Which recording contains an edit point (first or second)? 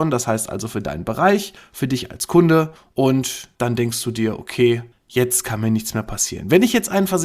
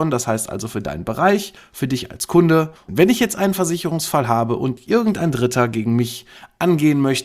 second